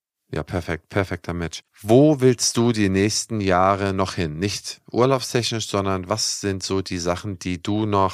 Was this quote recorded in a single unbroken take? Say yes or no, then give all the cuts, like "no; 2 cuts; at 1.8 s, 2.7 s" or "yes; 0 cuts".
no; 1 cut; at 1.7 s